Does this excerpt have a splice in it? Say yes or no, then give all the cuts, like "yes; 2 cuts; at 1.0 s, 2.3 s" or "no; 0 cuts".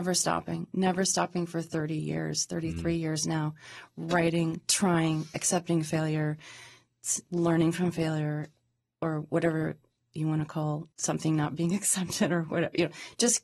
yes; 1 cut; at 10.9 s